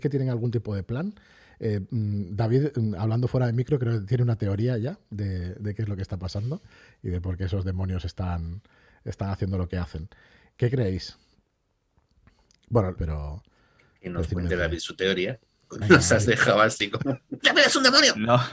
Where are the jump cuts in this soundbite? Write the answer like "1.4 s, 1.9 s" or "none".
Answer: 13.0 s, 15.8 s, 17.4 s